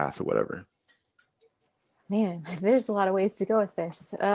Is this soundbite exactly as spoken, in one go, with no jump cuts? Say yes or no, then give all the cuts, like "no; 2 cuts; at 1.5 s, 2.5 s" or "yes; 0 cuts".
yes; 0 cuts